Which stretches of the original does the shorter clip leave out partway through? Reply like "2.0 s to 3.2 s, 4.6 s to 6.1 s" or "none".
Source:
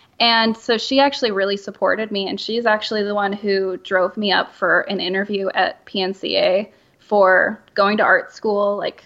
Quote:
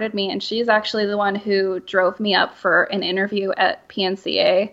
none